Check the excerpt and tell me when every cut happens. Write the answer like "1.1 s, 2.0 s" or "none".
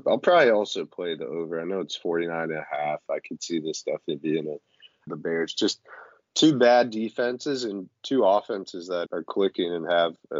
5.1 s, 9.1 s